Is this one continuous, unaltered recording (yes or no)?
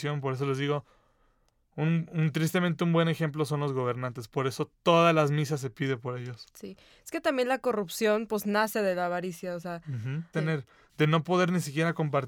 no